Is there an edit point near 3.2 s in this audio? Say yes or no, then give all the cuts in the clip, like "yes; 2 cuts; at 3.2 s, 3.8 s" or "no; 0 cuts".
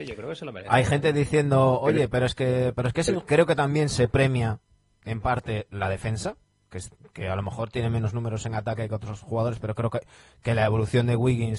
yes; 1 cut; at 3.2 s